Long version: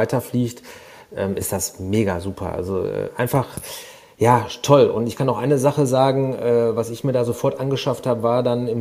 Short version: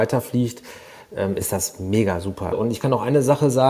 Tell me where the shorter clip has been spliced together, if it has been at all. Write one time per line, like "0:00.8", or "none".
0:02.5